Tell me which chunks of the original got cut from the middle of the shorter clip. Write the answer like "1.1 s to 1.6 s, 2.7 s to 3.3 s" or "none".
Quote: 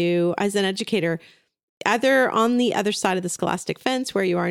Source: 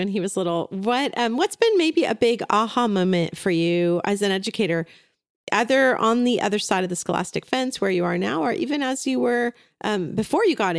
none